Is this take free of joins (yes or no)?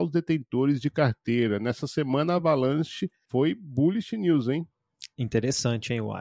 yes